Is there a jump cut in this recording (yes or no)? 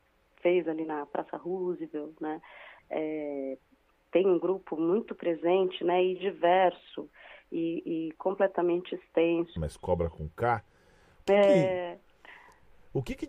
yes